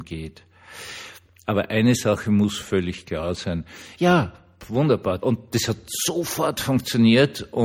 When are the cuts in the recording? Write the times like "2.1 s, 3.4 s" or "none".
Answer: 1.4 s, 3.9 s, 5.2 s